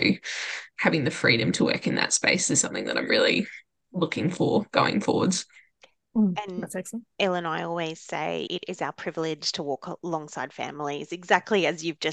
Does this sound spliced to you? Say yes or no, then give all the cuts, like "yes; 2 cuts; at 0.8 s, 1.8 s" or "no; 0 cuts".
no; 0 cuts